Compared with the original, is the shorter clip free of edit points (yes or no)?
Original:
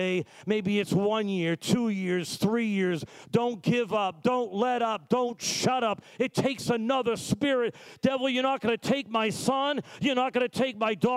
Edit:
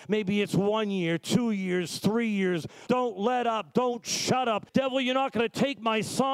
no